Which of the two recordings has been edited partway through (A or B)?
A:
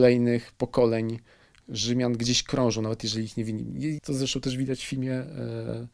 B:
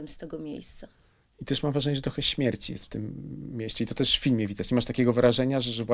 A